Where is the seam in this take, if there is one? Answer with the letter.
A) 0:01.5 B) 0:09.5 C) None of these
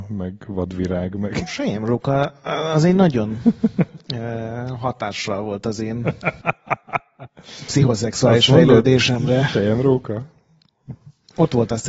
C